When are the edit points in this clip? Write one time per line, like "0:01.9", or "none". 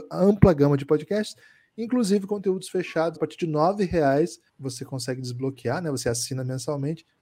0:03.1
0:04.5